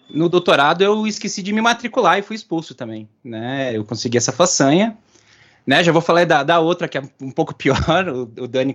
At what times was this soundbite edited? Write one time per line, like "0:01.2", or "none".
none